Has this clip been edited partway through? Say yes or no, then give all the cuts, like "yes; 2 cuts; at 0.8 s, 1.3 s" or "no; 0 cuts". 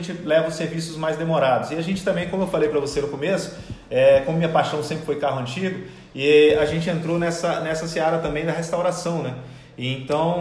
no; 0 cuts